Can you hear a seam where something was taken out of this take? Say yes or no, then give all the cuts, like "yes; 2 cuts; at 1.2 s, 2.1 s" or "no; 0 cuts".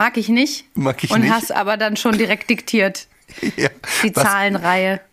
no; 0 cuts